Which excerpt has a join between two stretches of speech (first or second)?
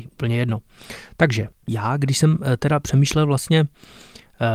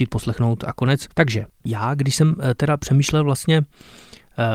second